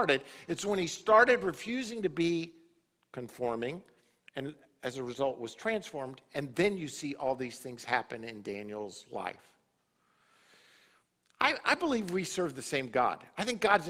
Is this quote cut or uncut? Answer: uncut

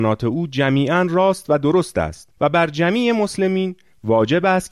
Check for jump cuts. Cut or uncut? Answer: cut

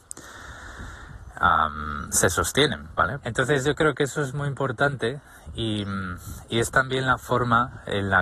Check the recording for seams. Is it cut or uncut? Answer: cut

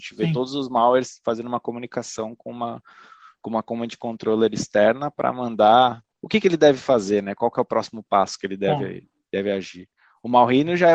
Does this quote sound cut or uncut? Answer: cut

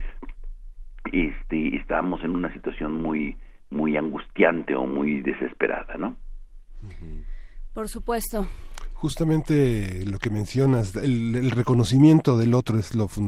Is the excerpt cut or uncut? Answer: uncut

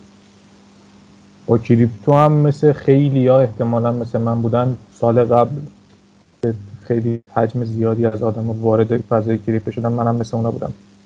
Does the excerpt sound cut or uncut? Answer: cut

